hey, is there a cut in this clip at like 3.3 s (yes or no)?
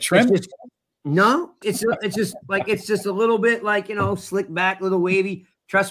no